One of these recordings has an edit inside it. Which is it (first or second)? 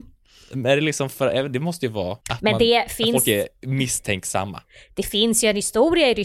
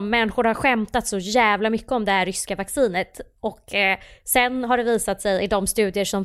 first